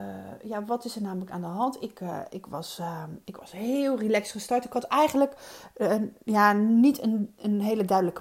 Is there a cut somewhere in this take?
no; 0 cuts

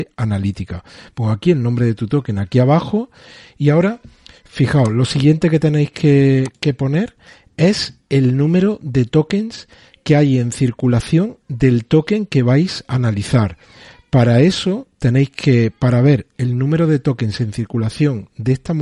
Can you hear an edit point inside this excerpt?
no; 0 cuts

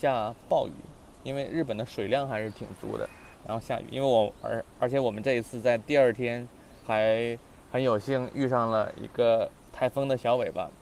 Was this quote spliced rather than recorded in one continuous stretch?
yes; 2 cuts; at 3.3 s, 6.8 s

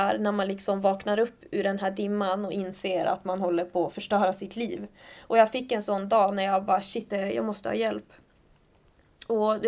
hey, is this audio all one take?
no; 1 cut; at 7.1 s

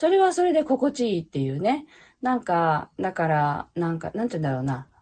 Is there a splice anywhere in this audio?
no; 0 cuts

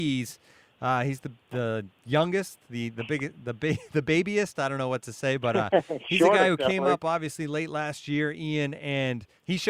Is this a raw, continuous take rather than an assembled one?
yes; 0 cuts

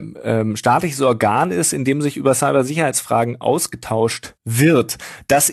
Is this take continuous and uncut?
no; 1 cut; at 4.4 s

